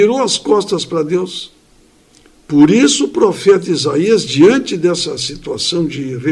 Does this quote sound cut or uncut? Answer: uncut